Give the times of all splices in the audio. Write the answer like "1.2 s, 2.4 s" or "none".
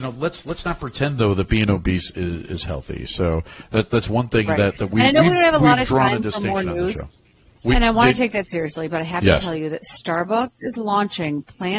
7.6 s, 8.9 s